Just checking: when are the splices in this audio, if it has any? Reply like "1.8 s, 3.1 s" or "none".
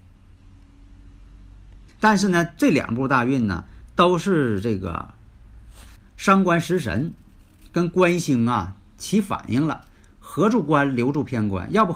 2.0 s